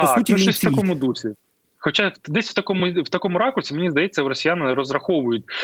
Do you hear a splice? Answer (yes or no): no